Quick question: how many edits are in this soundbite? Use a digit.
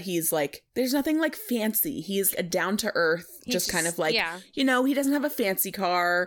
1